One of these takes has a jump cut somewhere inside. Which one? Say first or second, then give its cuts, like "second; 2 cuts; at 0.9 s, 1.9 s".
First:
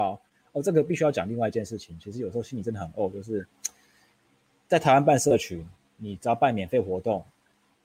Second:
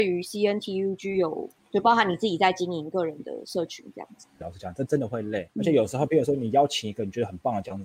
second; 3 cuts; at 1.6 s, 4.4 s, 5.5 s